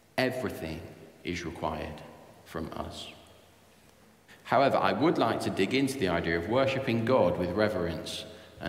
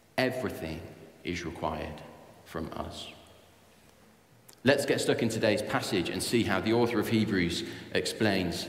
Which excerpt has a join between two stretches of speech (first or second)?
first